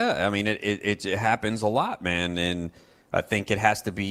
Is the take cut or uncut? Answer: uncut